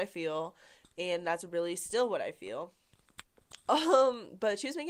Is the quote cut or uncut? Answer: cut